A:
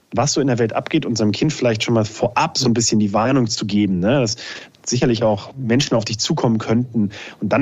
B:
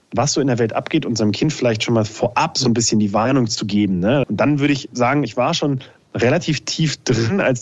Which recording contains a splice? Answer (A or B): B